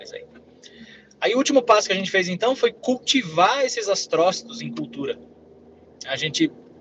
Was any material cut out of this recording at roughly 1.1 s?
no; 0 cuts

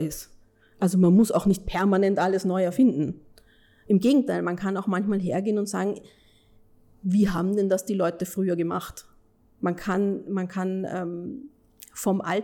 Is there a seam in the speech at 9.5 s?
no; 0 cuts

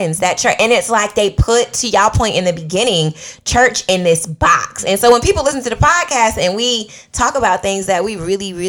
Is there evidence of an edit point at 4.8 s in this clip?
no; 0 cuts

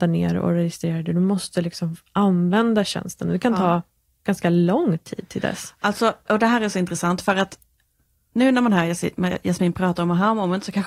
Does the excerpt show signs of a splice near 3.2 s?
no; 1 cut; at 6.3 s

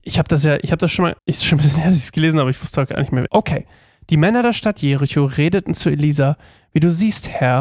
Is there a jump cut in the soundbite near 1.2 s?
yes; 2 cuts; at 1.2 s, 3.3 s

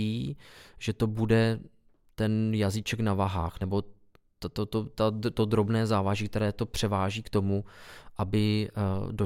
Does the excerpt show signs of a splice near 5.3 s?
no; 0 cuts

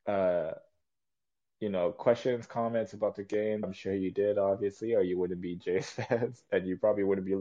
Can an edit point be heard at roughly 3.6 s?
yes; 1 cut; at 3.6 s

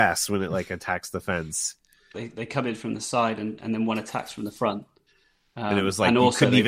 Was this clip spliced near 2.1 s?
yes; 1 cut; at 2.1 s

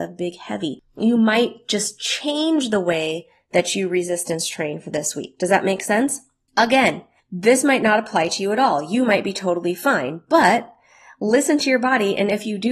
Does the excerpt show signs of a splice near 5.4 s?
no; 0 cuts

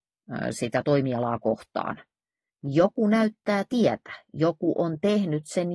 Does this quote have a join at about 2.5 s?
yes; 1 cut; at 2.5 s

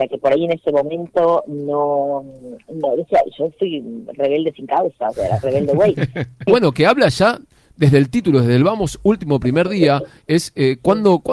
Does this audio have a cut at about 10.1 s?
no; 1 cut; at 6.5 s

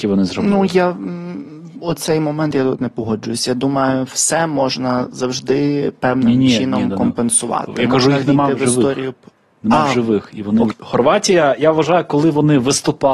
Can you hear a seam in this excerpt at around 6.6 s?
no; 1 cut; at 10.7 s

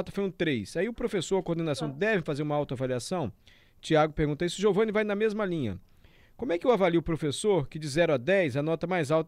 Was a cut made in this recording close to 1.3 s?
no; 0 cuts

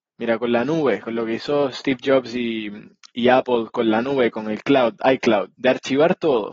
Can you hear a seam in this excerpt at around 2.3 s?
no; 1 cut; at 5.5 s

